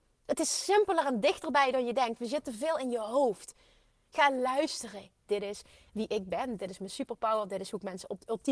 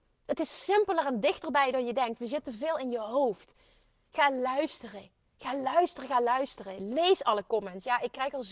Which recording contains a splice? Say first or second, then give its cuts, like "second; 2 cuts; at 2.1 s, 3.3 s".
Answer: first; 2 cuts; at 5.3 s, 6.6 s